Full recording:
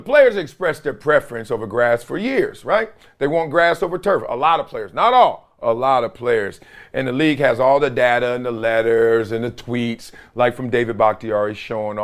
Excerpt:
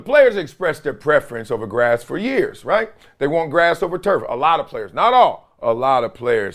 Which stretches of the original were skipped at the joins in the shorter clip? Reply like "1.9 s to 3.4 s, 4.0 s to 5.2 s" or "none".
none

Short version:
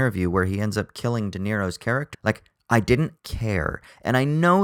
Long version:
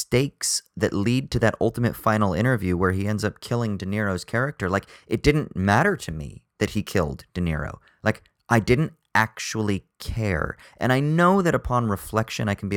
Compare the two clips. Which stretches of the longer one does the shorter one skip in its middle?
4.6 s to 7.9 s, 9.0 s to 9.9 s

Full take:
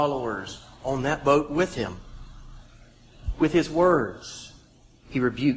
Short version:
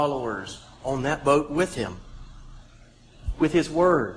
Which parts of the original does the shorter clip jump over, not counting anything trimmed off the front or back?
none

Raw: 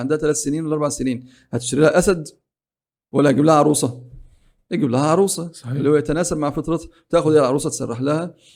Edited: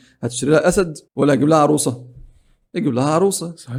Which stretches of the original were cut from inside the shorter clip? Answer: 2.4 s to 3.0 s

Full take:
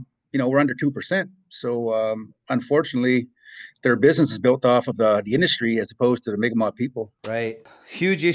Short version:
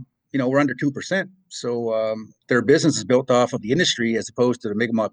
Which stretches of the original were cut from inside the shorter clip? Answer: 2.4 s to 3.8 s, 5.0 s to 5.2 s

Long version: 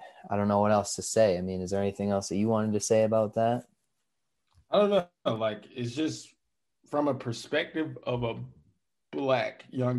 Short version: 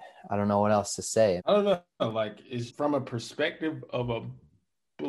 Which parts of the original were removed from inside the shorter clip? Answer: 1.4 s to 4.6 s, 5.9 s to 6.8 s

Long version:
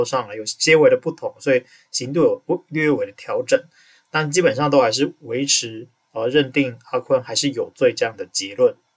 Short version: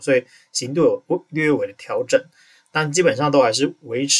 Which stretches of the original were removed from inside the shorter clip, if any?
none

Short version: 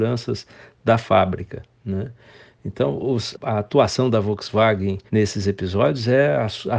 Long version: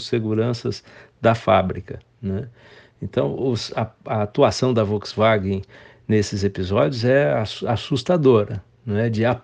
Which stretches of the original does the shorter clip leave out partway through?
3.7 s to 4.0 s, 5.7 s to 6.0 s

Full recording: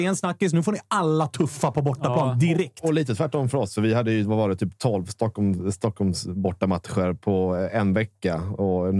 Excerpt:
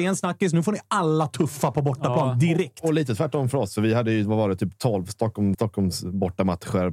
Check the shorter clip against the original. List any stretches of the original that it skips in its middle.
5.5 s to 5.8 s

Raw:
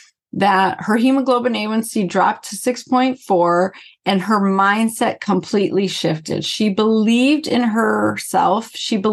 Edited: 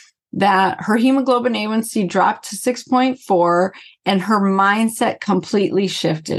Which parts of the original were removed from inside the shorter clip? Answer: none

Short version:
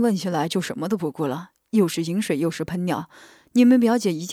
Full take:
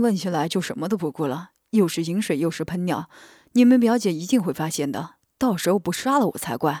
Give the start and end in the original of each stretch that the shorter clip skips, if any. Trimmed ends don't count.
none

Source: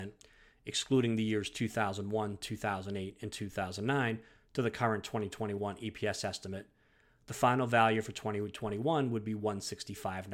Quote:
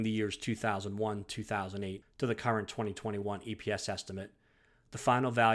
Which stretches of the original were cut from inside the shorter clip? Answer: 3.1 s to 4.4 s

